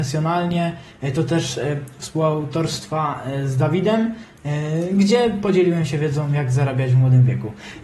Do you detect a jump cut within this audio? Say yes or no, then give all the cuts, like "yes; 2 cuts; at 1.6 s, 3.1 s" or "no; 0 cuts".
no; 0 cuts